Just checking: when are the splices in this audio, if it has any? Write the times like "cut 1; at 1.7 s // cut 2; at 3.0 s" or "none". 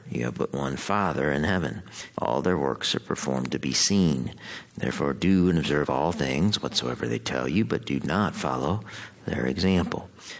cut 1; at 2.2 s // cut 2; at 4.7 s